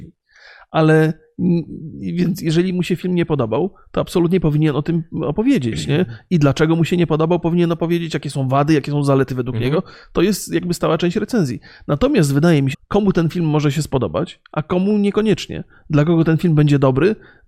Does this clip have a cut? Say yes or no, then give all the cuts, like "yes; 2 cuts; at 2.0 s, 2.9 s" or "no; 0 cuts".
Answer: yes; 1 cut; at 12.7 s